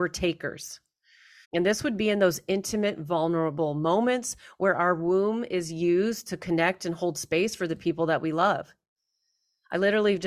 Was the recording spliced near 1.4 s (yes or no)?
yes